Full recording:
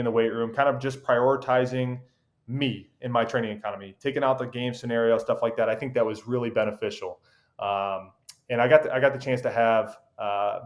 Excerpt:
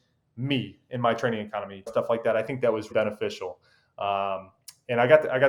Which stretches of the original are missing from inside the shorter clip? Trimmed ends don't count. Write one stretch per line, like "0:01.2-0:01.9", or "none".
0:04.0-0:05.2
0:06.2-0:06.5